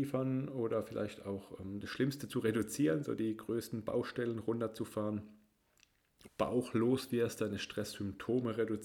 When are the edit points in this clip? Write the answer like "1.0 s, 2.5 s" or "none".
6.3 s